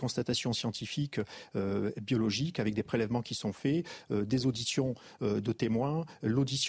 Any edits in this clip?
no; 0 cuts

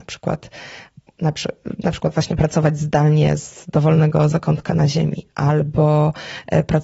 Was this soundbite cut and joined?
no; 0 cuts

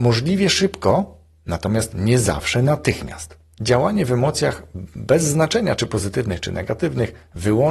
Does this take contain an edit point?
yes; 1 cut; at 3.5 s

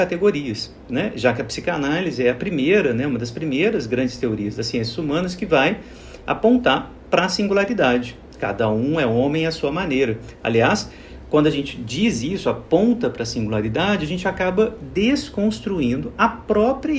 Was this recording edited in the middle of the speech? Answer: no; 0 cuts

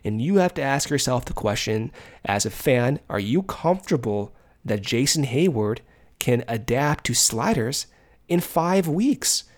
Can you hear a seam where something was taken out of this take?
no; 0 cuts

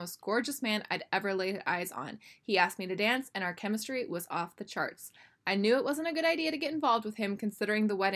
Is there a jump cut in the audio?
no; 0 cuts

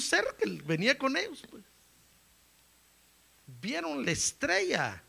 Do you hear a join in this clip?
no; 0 cuts

